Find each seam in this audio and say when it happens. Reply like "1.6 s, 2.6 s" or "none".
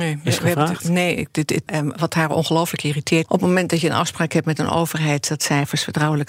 1.7 s, 3.2 s